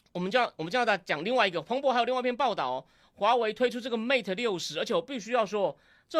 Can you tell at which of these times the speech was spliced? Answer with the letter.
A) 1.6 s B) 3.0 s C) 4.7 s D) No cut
B